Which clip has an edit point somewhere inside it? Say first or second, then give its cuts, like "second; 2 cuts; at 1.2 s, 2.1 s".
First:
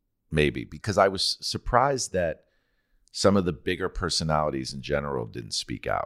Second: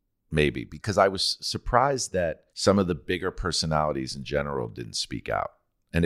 second; 1 cut; at 2.5 s